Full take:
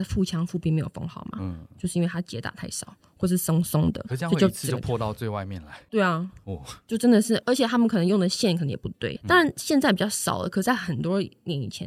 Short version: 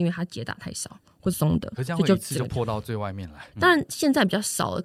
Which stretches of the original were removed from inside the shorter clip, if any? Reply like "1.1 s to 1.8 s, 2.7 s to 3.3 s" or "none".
3.3 s to 3.6 s, 5.8 s to 9.2 s